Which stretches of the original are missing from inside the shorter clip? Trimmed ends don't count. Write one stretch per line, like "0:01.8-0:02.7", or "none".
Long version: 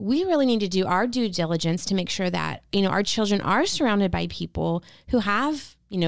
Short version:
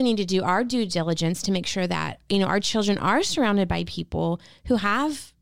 none

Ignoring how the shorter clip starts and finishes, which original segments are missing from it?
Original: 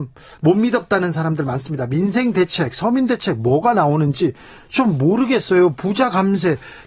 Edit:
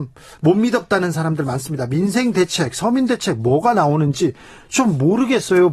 none

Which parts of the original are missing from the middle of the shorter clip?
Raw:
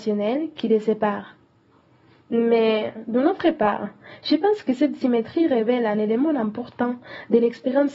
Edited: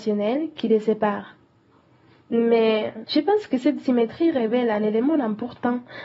0:03.0-0:04.2

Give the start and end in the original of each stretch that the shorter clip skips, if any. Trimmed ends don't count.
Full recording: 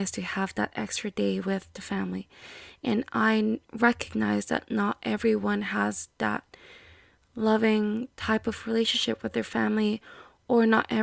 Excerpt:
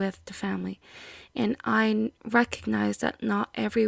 none

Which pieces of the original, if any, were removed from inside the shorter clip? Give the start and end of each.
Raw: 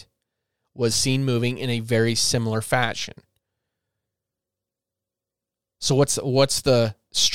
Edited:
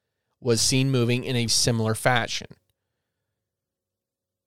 0:01.8-0:02.1

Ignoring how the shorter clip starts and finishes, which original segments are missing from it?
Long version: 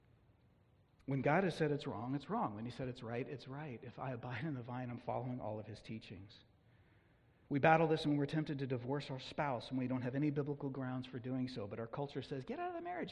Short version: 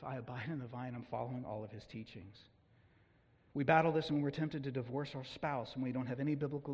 none

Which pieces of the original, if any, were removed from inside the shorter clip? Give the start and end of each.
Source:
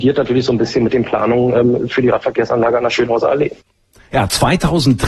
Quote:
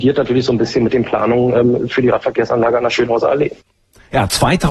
none

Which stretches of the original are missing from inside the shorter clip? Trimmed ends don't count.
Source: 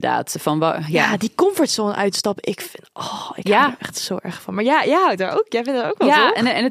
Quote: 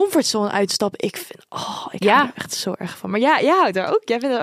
none

